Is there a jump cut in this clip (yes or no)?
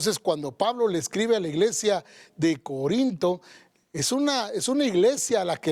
no